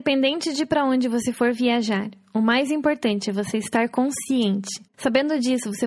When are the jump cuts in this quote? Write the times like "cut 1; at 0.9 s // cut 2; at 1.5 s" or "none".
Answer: cut 1; at 4.9 s

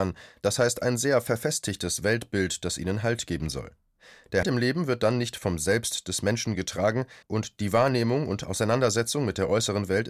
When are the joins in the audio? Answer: cut 1; at 4.4 s // cut 2; at 7.2 s

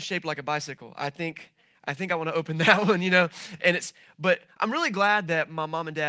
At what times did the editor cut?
none

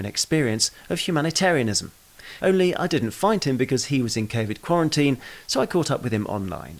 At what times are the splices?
cut 1; at 2.4 s

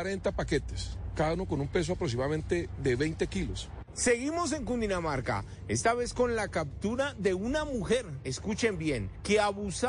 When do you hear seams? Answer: none

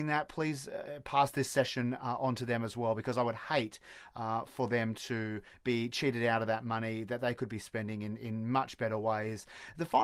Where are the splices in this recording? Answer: none

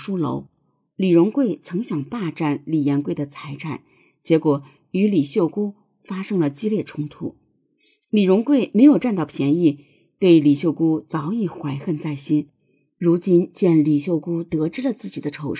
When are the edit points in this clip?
cut 1; at 0.9 s

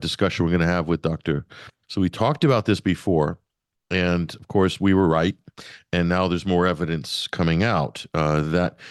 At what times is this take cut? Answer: cut 1; at 1.8 s

